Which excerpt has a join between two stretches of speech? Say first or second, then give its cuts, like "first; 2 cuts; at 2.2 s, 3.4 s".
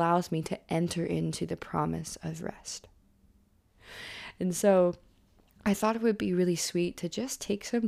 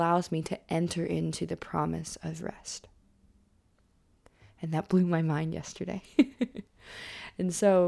first; 1 cut; at 3.7 s